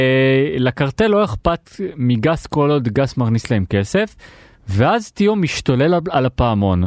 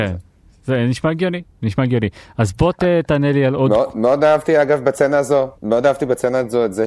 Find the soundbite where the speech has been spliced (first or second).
second